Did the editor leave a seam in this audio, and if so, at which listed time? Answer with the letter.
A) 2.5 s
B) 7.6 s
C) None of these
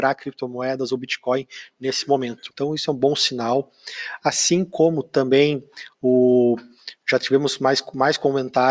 A